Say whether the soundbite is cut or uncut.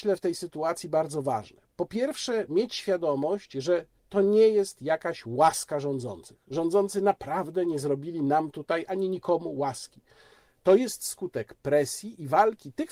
uncut